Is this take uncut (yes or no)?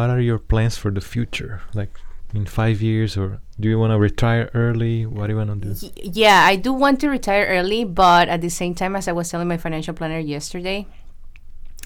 yes